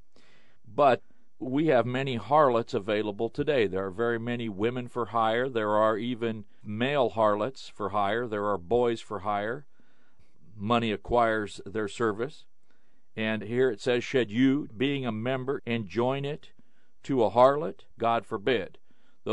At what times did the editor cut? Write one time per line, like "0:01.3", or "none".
0:15.6
0:17.9